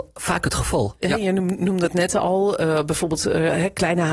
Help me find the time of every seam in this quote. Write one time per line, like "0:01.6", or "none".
0:01.0